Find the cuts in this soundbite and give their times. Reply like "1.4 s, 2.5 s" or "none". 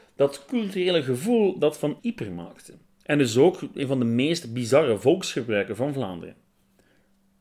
2.0 s